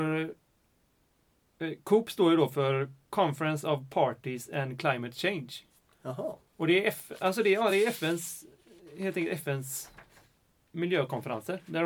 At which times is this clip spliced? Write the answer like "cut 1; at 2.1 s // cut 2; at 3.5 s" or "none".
none